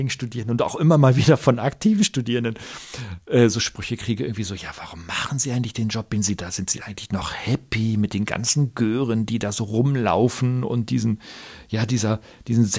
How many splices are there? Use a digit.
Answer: 0